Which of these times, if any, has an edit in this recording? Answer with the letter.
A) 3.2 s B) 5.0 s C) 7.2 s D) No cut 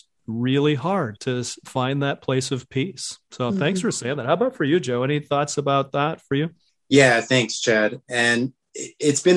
D